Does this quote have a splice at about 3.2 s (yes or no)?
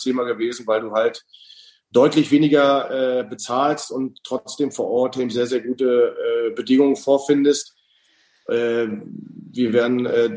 no